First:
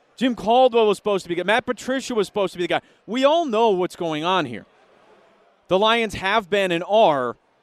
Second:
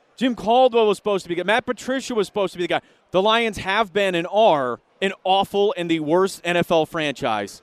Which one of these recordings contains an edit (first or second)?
second